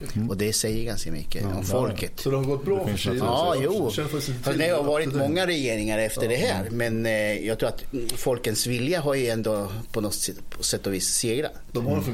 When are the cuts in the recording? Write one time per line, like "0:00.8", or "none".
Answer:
none